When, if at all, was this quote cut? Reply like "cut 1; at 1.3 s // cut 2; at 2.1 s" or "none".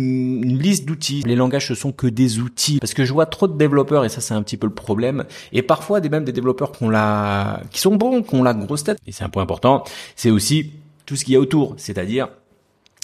cut 1; at 1.2 s // cut 2; at 2.8 s // cut 3; at 9.0 s